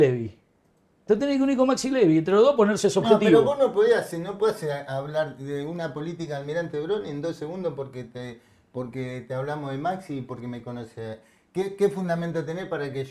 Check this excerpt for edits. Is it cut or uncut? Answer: uncut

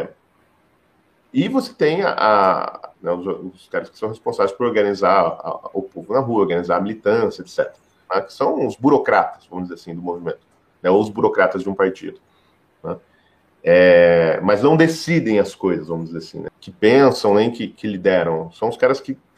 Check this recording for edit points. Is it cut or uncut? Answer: cut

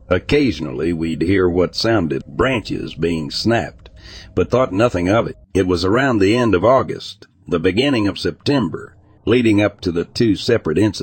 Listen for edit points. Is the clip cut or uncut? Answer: cut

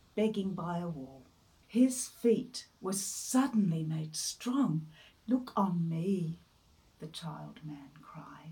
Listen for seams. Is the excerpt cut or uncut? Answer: cut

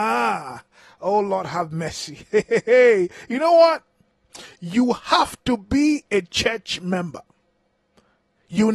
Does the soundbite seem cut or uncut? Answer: uncut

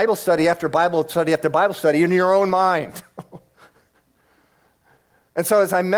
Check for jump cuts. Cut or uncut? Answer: uncut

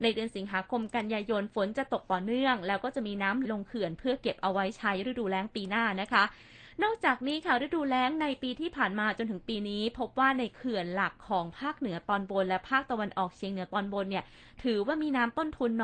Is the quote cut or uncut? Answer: cut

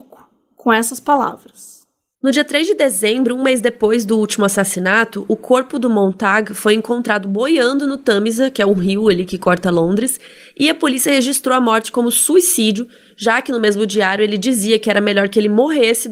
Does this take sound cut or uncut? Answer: uncut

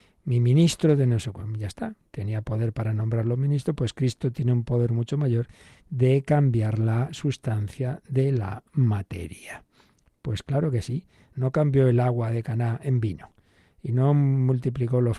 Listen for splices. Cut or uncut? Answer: cut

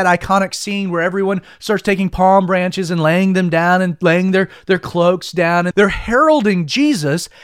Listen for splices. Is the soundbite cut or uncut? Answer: cut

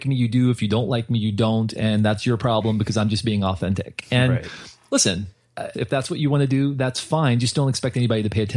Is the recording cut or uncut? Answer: cut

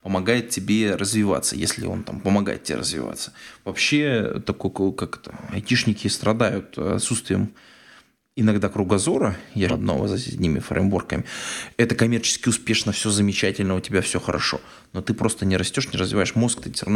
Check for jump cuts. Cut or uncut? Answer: cut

